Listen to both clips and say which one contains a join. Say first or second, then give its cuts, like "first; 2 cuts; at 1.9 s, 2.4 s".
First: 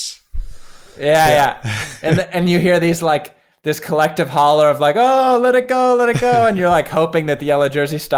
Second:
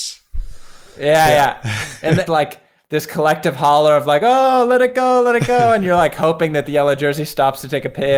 second; 1 cut; at 2.3 s